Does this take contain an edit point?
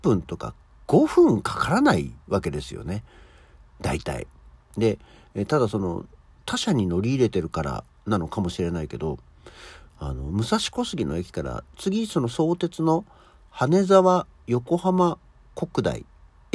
no; 0 cuts

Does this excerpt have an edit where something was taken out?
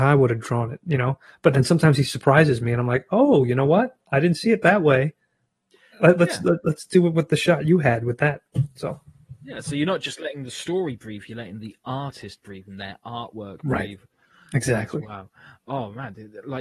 no; 0 cuts

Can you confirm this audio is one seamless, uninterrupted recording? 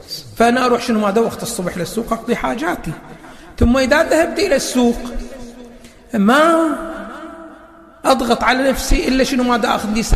yes; 0 cuts

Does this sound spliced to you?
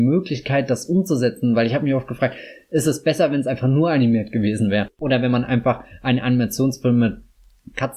no; 0 cuts

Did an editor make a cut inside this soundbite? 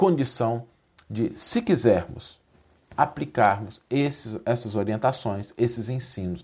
no; 0 cuts

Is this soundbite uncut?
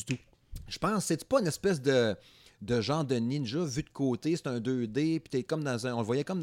yes; 0 cuts

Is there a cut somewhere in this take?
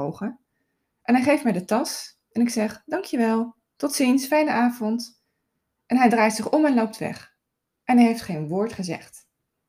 no; 0 cuts

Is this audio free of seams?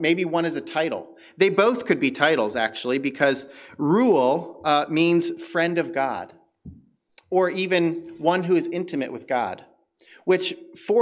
yes; 0 cuts

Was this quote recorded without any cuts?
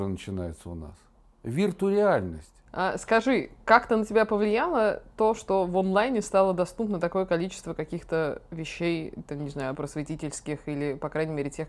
no; 1 cut; at 9.7 s

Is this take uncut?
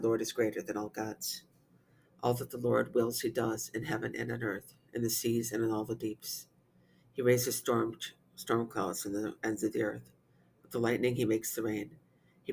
yes; 0 cuts

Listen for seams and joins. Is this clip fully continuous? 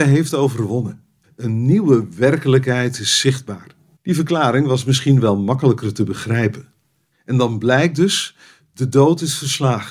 no; 3 cuts; at 1.2 s, 4.0 s, 7.1 s

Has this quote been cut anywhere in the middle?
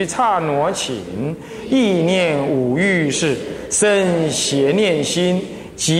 yes; 1 cut; at 3.1 s

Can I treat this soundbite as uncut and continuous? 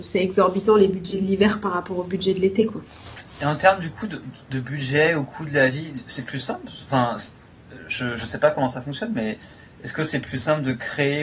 yes; 0 cuts

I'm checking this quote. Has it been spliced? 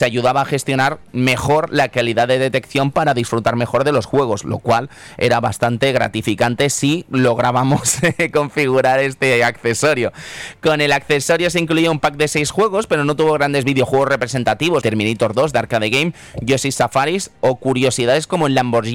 yes; 1 cut; at 14.8 s

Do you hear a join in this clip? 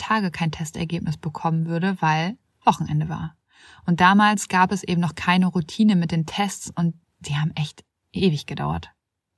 no; 0 cuts

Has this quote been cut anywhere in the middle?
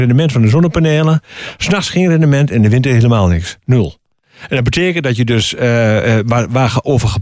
no; 0 cuts

